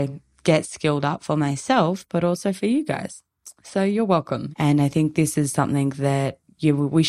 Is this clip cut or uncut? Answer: cut